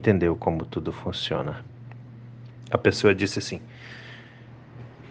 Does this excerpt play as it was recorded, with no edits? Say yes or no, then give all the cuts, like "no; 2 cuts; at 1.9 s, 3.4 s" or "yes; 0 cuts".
yes; 0 cuts